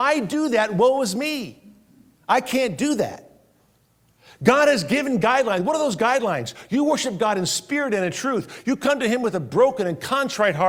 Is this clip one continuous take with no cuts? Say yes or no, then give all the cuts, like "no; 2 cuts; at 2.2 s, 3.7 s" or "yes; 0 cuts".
yes; 0 cuts